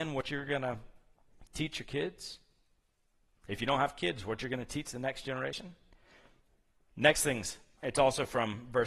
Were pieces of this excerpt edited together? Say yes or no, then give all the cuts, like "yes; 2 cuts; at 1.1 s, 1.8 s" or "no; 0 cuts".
yes; 1 cut; at 7.8 s